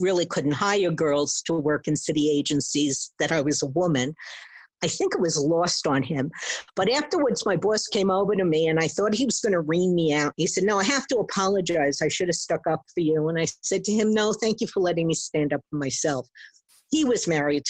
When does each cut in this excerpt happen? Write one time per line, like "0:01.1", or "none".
none